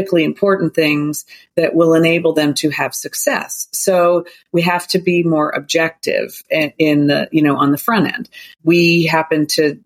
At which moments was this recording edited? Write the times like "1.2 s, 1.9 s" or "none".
none